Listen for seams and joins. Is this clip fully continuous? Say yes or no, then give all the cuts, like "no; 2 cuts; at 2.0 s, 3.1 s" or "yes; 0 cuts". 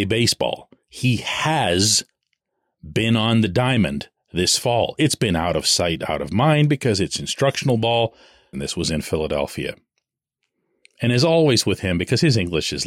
no; 1 cut; at 8.5 s